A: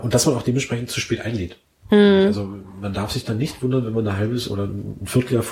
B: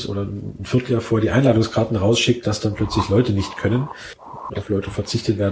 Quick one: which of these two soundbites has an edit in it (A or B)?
B